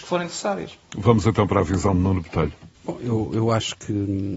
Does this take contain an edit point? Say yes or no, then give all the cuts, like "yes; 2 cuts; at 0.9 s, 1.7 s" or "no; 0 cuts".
yes; 1 cut; at 2.7 s